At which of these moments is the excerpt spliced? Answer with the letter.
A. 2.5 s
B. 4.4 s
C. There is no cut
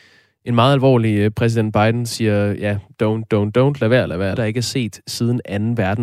B